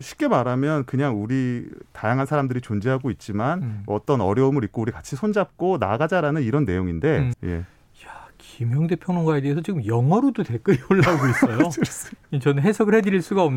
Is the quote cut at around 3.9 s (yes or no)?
no